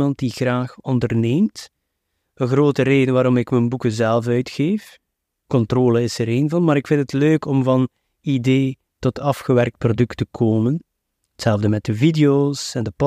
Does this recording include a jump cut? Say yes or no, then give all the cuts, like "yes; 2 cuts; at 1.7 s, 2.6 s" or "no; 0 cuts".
no; 0 cuts